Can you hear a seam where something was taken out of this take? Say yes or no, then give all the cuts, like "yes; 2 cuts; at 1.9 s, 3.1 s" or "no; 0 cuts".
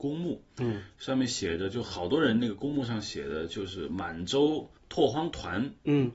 yes; 1 cut; at 4.8 s